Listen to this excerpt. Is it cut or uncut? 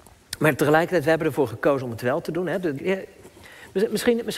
cut